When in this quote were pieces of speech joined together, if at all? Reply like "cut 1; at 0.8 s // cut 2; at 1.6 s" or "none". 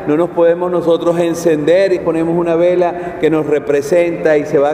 cut 1; at 2.0 s

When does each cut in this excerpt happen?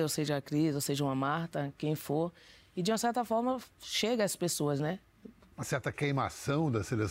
cut 1; at 2.6 s // cut 2; at 5.5 s

